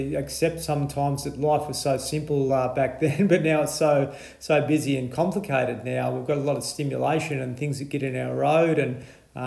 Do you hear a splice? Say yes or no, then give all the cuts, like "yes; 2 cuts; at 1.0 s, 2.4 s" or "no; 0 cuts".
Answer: no; 0 cuts